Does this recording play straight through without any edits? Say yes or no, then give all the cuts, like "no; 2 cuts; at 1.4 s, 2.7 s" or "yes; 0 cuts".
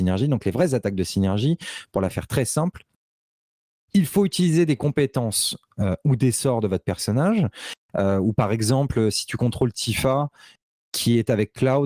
no; 1 cut; at 7.8 s